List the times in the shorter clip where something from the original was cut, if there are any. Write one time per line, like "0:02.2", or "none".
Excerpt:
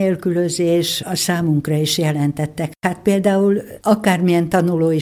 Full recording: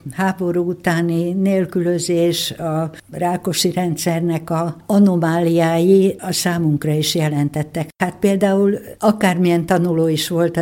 0:01.0